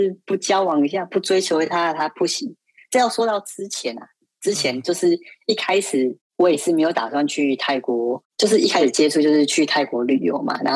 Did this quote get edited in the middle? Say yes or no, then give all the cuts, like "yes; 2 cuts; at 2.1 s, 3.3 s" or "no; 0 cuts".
no; 0 cuts